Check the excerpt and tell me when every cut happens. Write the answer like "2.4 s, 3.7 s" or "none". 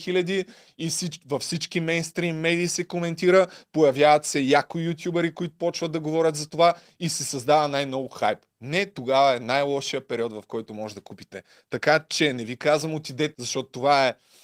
13.3 s